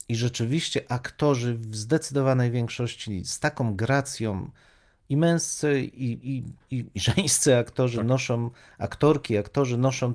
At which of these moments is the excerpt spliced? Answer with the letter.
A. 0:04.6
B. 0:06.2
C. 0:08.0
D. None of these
D